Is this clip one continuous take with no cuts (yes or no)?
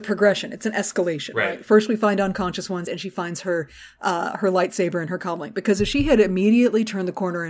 yes